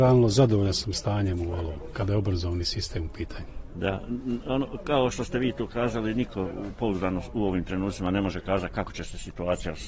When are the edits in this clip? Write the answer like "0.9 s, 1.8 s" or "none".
none